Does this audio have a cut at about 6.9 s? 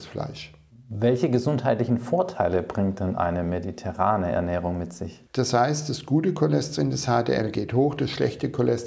no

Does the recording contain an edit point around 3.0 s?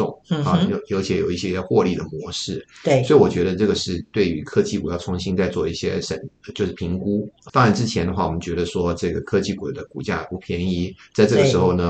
no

